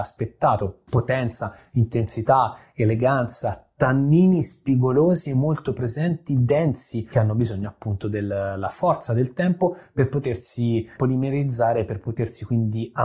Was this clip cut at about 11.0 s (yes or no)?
yes